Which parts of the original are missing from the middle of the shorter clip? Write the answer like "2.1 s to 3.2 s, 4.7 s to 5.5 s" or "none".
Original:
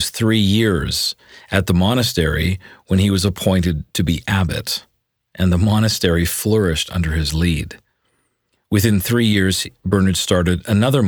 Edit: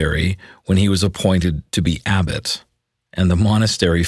none